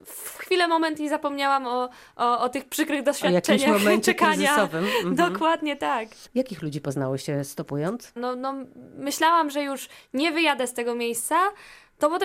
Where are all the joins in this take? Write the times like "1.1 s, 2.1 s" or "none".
6.3 s, 8.2 s